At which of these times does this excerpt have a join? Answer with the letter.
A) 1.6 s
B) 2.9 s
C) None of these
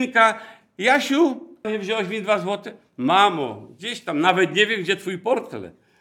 A